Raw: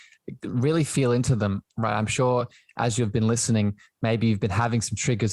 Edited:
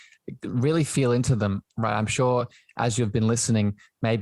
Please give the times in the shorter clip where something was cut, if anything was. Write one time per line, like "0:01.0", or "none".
none